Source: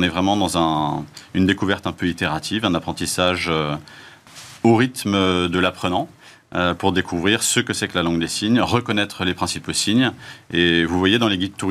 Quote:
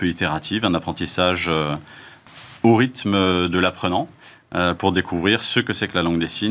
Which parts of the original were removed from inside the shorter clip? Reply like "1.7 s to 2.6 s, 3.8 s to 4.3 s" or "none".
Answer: none

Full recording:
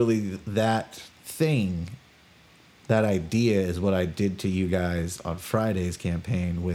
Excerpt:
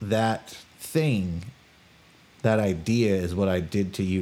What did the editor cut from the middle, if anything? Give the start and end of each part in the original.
none

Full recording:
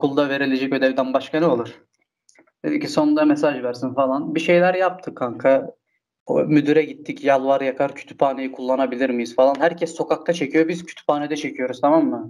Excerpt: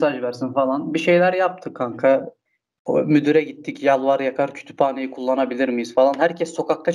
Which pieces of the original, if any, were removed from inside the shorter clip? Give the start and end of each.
none

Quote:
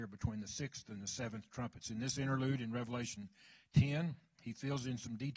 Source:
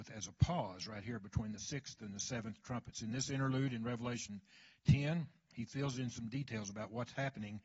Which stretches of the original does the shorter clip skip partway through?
none

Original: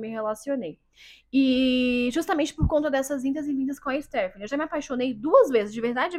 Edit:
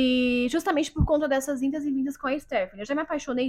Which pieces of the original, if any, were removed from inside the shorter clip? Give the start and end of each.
none

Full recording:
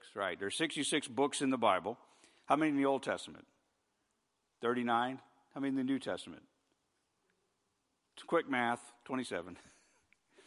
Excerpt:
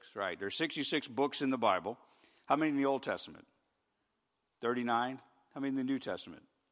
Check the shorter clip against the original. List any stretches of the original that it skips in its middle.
none

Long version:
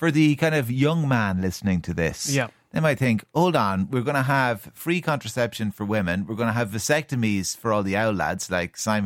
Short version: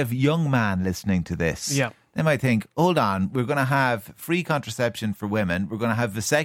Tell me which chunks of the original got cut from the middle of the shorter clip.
none

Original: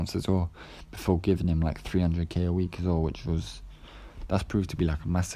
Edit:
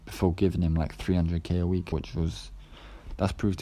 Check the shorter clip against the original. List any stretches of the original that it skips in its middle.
2.8 s to 3.0 s

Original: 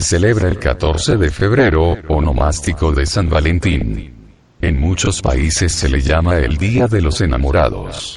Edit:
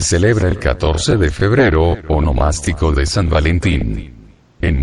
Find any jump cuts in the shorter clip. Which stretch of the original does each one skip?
none

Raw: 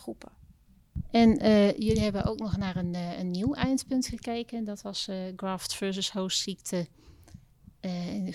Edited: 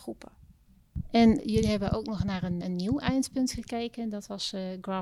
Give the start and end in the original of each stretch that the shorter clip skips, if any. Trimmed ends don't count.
1.4 s to 1.7 s, 2.9 s to 3.2 s

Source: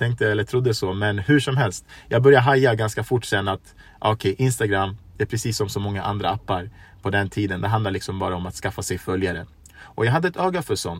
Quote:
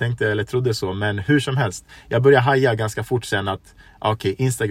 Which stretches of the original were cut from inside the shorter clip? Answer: none

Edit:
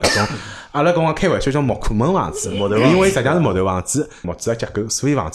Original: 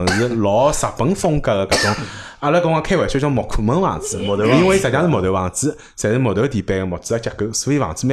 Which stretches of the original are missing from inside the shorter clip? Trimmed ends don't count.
5.9 s to 6.9 s

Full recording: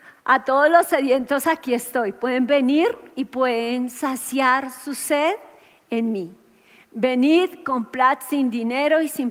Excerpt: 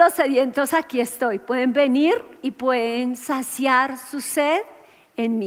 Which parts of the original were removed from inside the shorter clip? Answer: none

